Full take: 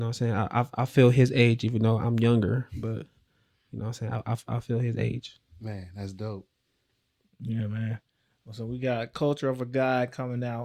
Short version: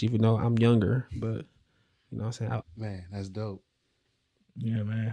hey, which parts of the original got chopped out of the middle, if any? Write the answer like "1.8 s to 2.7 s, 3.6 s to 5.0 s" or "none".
4.2 s to 5.5 s